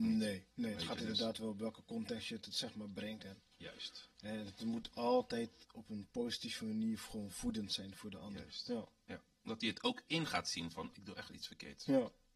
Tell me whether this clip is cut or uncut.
cut